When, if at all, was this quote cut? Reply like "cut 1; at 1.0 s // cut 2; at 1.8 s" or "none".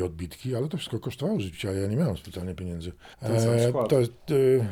cut 1; at 3.1 s